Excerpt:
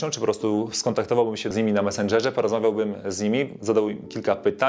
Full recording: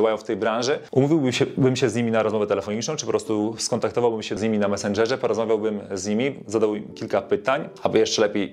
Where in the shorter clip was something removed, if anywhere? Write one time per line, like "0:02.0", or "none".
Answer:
none